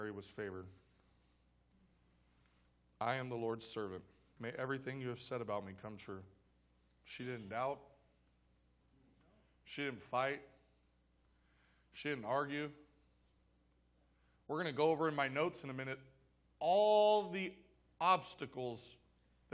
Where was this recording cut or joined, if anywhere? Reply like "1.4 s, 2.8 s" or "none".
none